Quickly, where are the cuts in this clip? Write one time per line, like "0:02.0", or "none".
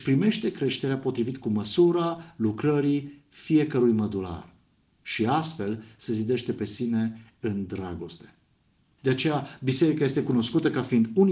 0:09.0